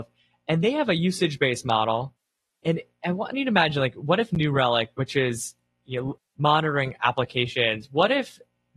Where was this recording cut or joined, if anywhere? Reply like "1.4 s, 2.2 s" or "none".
6.2 s